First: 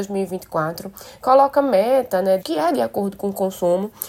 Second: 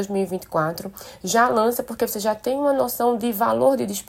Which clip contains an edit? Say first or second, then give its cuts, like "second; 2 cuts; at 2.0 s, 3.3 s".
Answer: first; 2 cuts; at 1.2 s, 2.4 s